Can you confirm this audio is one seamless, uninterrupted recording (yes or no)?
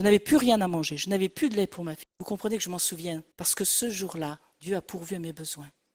no